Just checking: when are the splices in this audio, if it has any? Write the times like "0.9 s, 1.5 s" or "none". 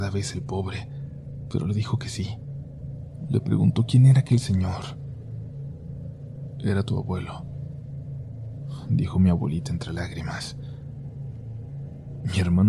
none